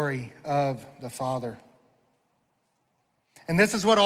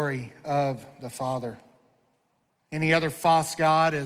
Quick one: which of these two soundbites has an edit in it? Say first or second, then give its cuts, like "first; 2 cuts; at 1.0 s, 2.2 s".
second; 1 cut; at 2.5 s